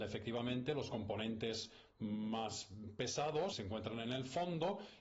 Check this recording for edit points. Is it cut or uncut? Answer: cut